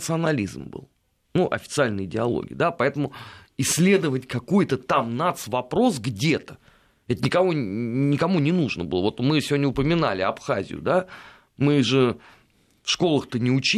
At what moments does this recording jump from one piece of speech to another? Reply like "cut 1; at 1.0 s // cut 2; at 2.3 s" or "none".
none